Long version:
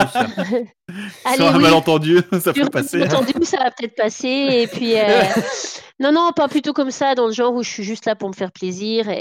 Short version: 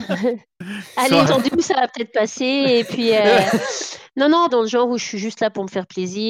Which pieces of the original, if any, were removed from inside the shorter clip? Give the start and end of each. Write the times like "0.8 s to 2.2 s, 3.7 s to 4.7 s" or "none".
1.5 s to 3.1 s, 6.3 s to 7.1 s